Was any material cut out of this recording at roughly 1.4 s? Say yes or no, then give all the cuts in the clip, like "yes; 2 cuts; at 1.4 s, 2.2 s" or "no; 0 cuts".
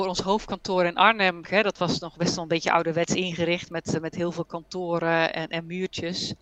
yes; 1 cut; at 1.4 s